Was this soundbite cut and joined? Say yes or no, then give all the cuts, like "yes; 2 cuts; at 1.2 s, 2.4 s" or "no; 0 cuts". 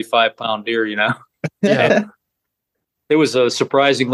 no; 0 cuts